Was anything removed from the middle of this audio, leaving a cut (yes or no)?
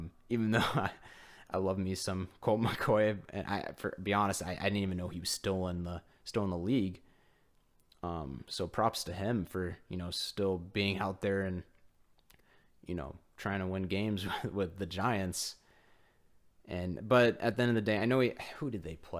no